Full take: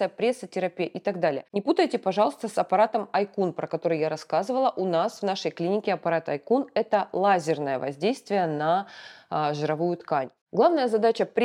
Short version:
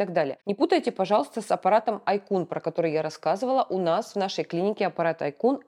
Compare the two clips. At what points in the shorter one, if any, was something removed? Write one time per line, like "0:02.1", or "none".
none